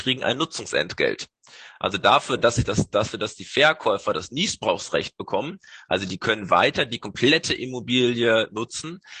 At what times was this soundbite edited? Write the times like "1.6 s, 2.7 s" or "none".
none